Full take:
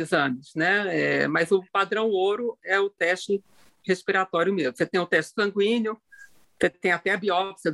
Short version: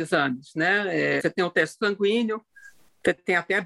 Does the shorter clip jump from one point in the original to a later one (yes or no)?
yes